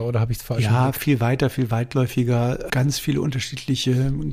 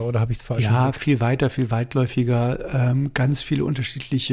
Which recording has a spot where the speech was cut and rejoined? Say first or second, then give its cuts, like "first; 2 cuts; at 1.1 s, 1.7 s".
first; 1 cut; at 2.7 s